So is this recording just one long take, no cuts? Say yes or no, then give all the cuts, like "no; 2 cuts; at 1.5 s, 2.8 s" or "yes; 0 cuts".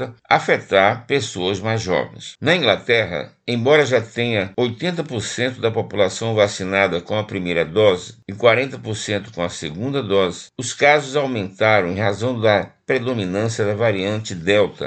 no; 1 cut; at 2.4 s